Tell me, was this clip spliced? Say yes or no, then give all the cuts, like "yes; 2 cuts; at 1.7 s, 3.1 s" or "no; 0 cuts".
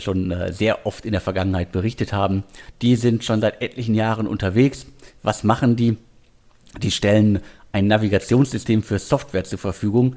yes; 1 cut; at 2.7 s